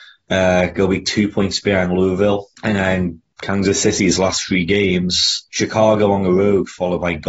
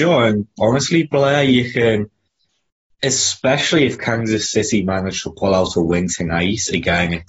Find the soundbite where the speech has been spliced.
first; 2 cuts; at 2.5 s, 5.5 s

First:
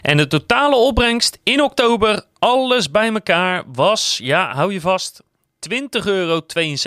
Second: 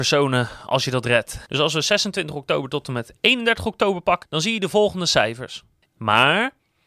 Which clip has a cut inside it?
second; 3 cuts; at 1.5 s, 4.2 s, 5.9 s

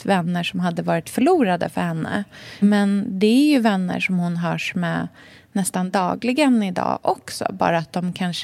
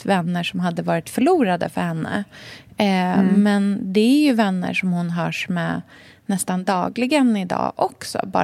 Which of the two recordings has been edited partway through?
first; 1 cut; at 2.6 s

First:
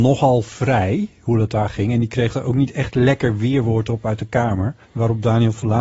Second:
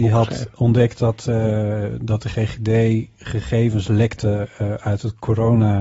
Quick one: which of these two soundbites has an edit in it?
first; 1 cut; at 4.8 s

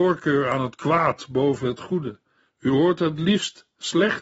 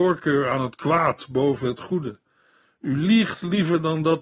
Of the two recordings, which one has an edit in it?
first; 1 cut; at 2.4 s

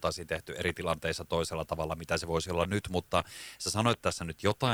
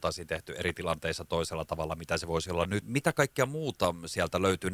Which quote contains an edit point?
second; 1 cut; at 2.8 s

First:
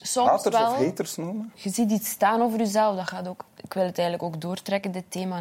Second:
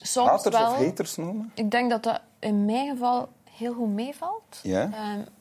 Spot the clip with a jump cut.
first; 2 cuts; at 1.5 s, 3.5 s

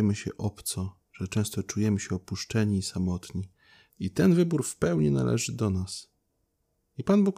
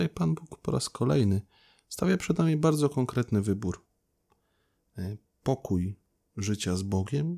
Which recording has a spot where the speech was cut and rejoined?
first; 1 cut; at 3.9 s

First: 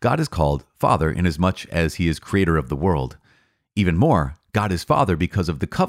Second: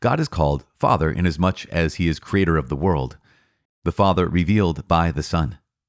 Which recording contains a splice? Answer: second; 1 cut; at 3.7 s

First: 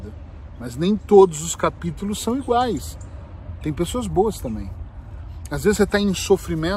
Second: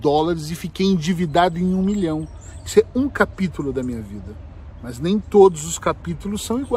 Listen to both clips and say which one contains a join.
first; 1 cut; at 3.6 s

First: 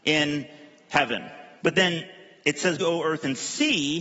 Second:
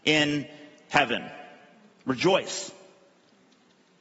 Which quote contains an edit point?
first; 2 cuts; at 1.6 s, 2.8 s

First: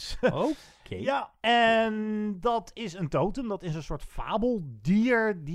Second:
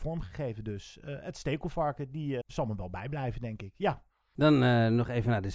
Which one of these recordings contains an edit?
second; 1 cut; at 2.4 s

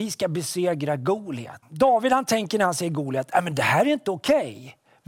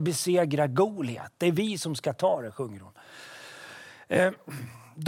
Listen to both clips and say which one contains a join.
first; 1 cut; at 1.6 s

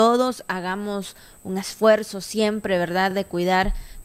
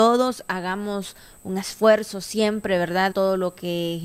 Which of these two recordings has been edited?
second; 1 cut; at 3.1 s

